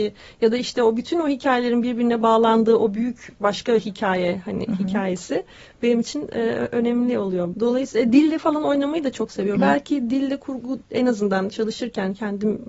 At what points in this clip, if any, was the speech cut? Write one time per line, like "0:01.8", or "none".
0:07.5
0:09.6